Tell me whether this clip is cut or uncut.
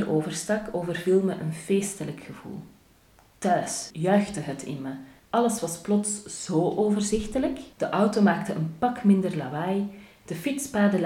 cut